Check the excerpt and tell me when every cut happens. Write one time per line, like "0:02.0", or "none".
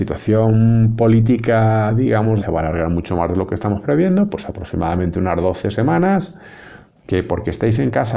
0:02.4
0:07.0